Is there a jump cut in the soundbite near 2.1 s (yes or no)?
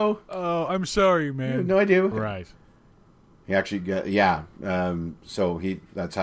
yes